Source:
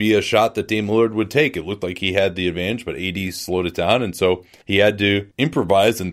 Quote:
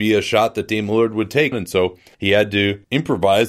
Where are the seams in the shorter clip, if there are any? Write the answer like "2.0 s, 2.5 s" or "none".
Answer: 1.5 s